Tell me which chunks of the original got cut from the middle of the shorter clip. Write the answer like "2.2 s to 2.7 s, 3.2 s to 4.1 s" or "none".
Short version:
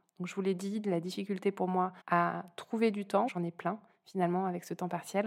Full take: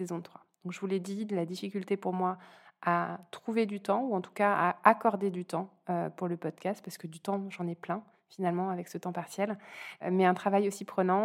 2.5 s to 2.8 s, 4.0 s to 7.5 s